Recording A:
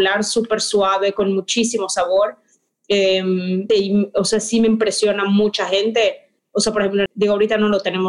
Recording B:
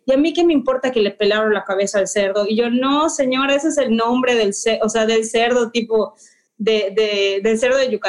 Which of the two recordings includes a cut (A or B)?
A